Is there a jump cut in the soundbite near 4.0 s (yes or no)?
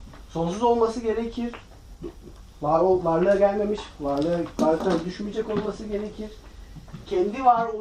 no